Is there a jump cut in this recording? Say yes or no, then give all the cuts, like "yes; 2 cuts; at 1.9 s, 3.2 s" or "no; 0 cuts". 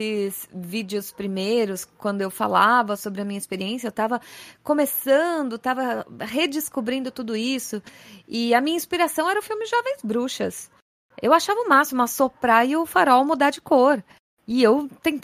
no; 0 cuts